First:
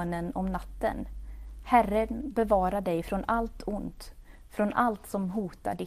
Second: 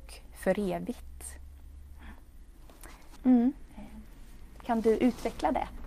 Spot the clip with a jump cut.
second; 1 cut; at 3.2 s

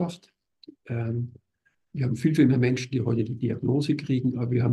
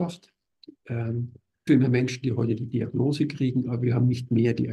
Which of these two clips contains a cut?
second; 1 cut; at 1.7 s

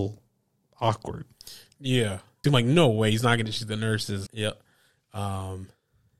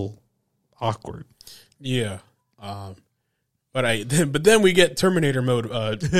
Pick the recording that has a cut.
first; 2 cuts; at 2.4 s, 4.3 s

